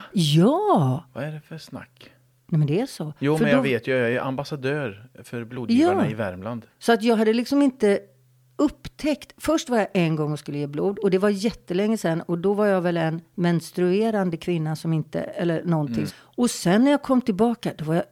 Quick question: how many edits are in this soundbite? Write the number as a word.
two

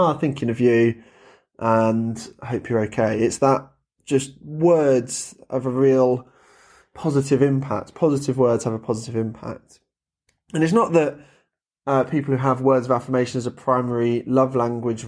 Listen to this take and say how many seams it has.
zero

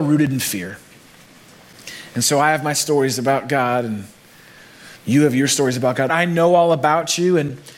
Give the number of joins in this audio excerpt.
one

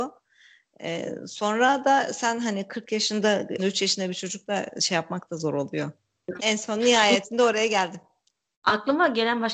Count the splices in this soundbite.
two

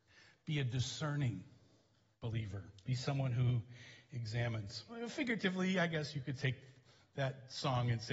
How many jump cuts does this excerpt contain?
two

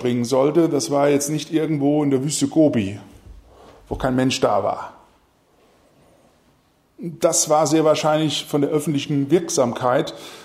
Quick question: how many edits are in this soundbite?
zero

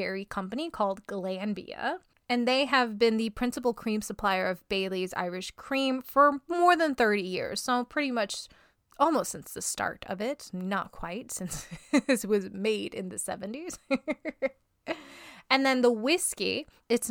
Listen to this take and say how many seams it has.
zero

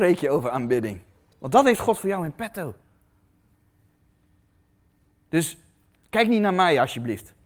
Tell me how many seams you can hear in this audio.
one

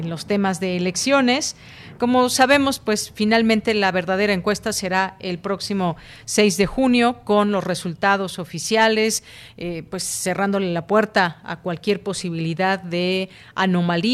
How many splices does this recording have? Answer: one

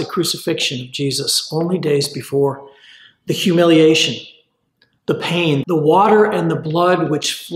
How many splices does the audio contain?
one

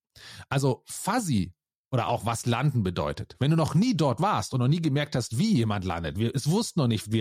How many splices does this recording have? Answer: zero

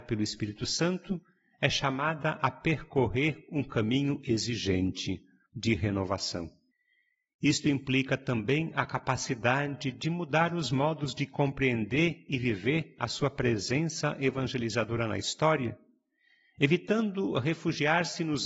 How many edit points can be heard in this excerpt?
one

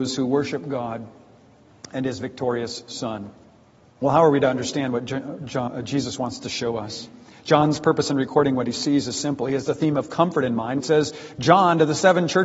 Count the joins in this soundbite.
two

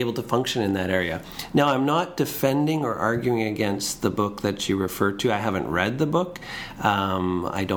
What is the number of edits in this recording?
zero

